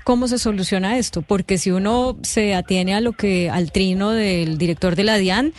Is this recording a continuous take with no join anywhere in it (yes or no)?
yes